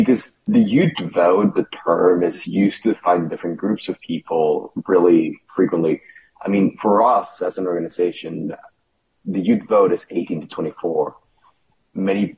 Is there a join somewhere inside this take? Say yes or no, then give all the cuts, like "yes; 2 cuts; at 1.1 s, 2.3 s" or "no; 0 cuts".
no; 0 cuts